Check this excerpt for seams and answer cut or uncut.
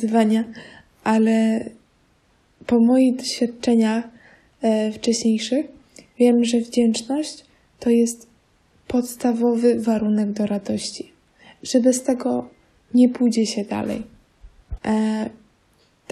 cut